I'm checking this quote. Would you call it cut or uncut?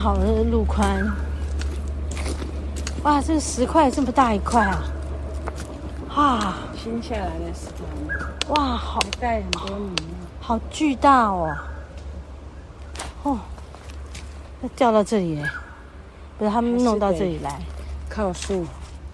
uncut